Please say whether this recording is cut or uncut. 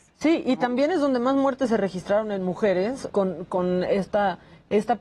cut